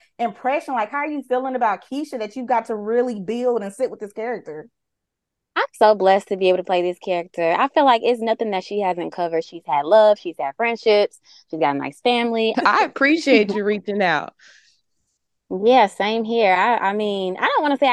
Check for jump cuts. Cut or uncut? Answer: cut